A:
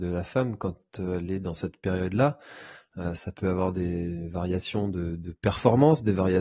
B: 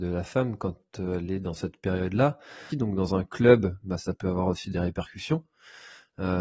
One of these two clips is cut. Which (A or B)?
B